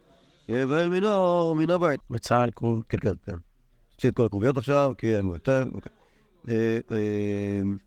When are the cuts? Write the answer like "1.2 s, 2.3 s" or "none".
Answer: 2.0 s